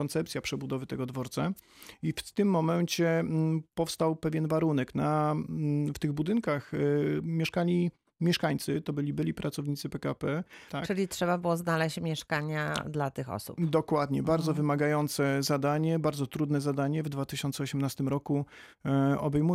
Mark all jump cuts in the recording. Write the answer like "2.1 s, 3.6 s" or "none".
10.7 s